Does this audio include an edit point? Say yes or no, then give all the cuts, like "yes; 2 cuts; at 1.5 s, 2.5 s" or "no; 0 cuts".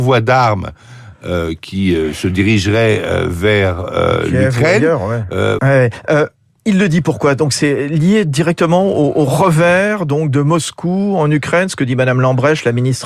yes; 1 cut; at 5.6 s